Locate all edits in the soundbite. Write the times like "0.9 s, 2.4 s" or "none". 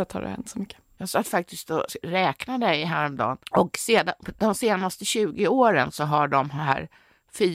0.9 s, 3.4 s